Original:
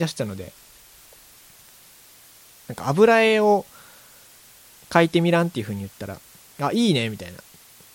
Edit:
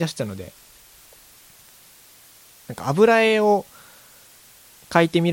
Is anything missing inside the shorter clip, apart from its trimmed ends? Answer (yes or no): no